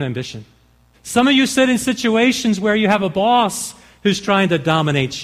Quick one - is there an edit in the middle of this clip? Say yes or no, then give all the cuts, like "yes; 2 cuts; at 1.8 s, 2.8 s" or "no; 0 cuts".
yes; 1 cut; at 0.9 s